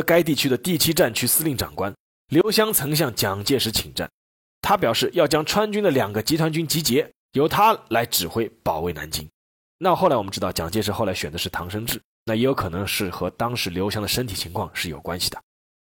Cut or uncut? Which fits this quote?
uncut